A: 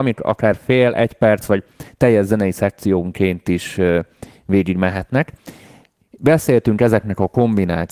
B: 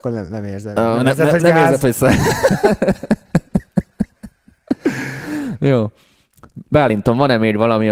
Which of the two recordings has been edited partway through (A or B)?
B